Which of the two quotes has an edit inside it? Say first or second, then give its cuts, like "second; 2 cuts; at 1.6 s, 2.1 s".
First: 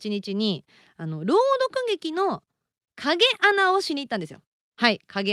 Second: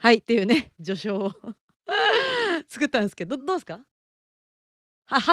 second; 1 cut; at 3.4 s